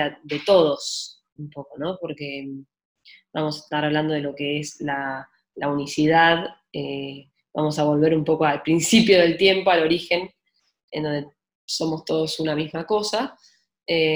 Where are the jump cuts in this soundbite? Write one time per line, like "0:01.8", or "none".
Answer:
none